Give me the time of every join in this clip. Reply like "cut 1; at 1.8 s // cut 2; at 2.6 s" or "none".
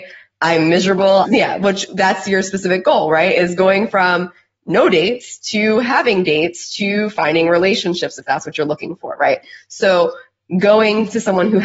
cut 1; at 1.2 s